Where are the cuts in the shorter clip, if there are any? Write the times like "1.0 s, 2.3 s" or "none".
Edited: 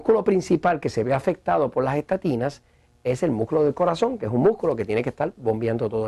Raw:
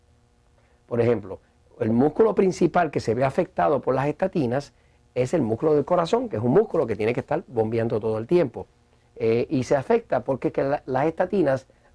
none